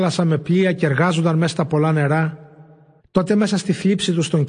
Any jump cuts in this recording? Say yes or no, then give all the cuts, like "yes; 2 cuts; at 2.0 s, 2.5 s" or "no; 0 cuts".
yes; 1 cut; at 3.0 s